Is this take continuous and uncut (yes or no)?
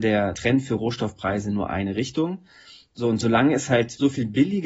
yes